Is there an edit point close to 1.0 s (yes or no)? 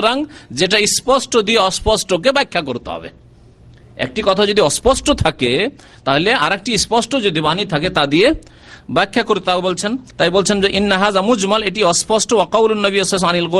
yes